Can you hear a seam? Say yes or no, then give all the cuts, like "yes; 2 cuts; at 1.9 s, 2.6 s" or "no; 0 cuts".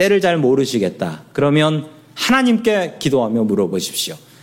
no; 0 cuts